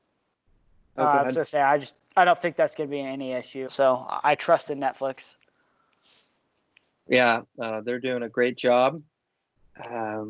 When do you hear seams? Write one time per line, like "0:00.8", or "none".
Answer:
0:03.7
0:07.5